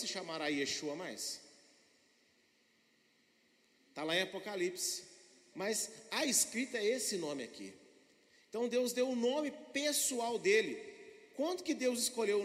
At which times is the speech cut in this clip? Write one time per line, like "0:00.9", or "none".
0:05.5